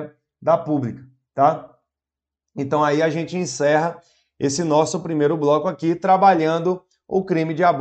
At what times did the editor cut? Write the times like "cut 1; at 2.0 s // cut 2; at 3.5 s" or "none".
none

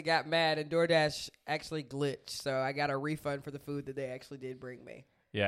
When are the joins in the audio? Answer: none

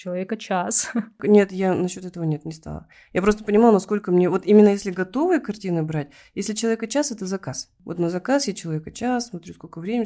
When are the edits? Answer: none

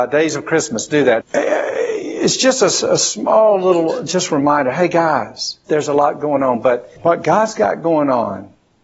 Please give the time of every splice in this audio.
cut 1; at 1.2 s // cut 2; at 5.7 s // cut 3; at 7.0 s

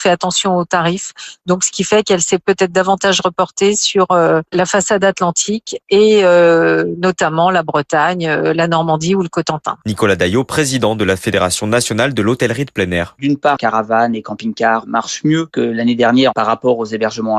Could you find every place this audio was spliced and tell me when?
cut 1; at 9.8 s // cut 2; at 13.6 s

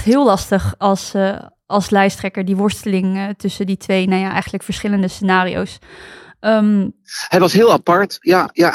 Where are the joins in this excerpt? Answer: none

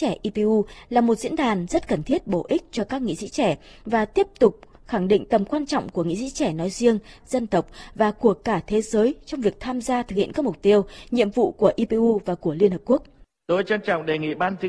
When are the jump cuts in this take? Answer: cut 1; at 7.2 s

